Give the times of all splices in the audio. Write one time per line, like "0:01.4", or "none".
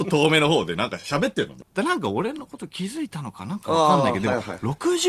0:01.6